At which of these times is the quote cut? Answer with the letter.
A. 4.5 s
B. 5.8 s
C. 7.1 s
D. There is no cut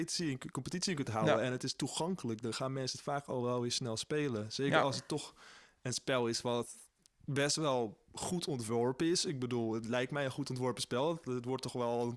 D